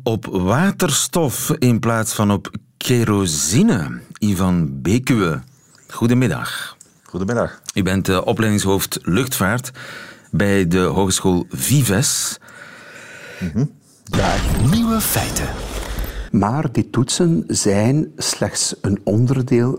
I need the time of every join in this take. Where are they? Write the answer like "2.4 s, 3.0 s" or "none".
14.1 s, 16.3 s

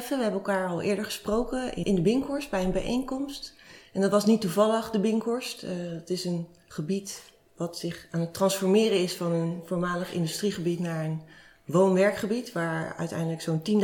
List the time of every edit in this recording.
1.8 s

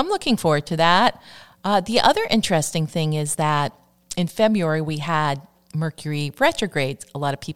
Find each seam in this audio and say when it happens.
none

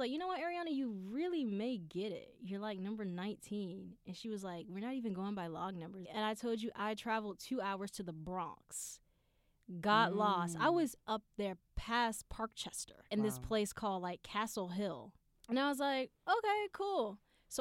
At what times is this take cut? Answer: 6.0 s, 13.1 s, 15.3 s

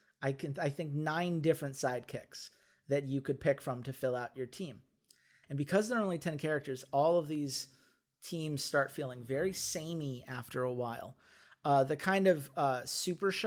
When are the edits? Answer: 5.4 s

